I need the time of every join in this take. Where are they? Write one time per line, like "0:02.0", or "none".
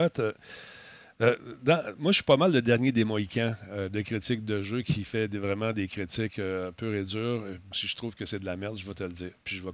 0:07.7